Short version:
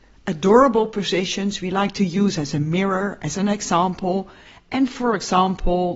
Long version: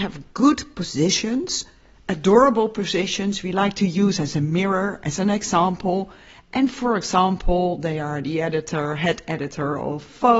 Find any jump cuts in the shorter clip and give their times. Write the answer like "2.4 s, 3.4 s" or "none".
none